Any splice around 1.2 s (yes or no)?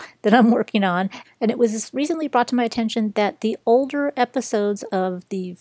yes